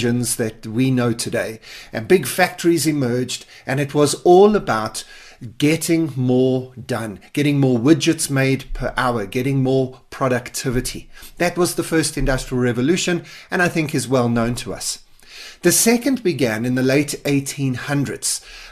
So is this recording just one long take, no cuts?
yes; 0 cuts

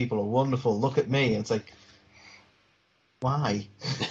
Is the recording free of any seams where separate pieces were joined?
yes; 0 cuts

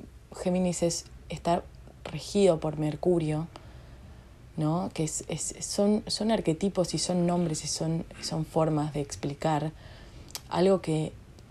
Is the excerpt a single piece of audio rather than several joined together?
yes; 0 cuts

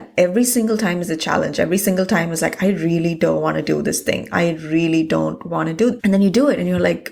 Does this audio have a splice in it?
yes; 1 cut; at 6.0 s

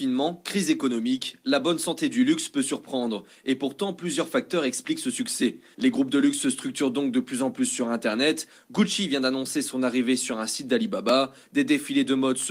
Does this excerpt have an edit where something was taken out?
yes; 1 cut; at 5.7 s

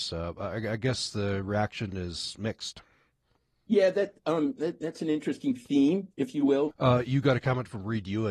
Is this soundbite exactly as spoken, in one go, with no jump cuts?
no; 1 cut; at 6.7 s

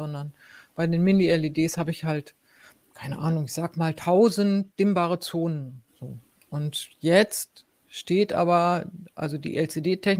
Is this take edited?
yes; 1 cut; at 5.9 s

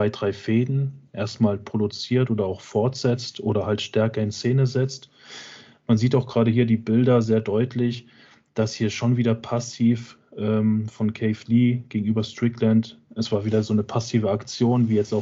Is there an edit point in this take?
no; 0 cuts

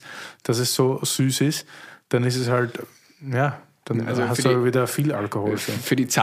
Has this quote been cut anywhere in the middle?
no; 0 cuts

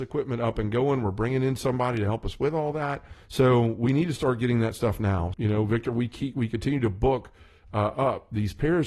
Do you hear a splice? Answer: yes; 2 cuts; at 3.2 s, 5.3 s

